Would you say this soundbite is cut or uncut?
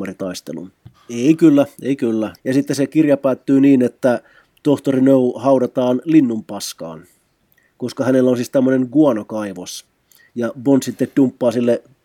cut